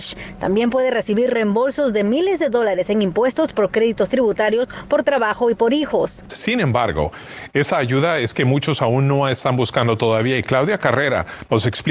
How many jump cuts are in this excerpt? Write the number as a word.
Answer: one